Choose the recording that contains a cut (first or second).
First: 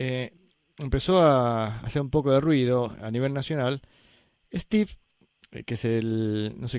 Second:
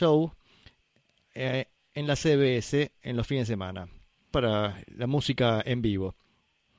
second